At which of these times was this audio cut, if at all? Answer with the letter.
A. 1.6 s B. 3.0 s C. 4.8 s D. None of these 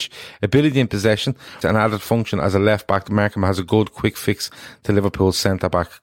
A